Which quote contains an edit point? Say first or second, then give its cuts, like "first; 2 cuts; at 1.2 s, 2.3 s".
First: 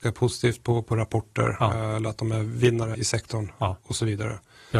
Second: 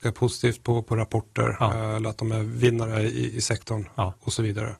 first; 1 cut; at 2.9 s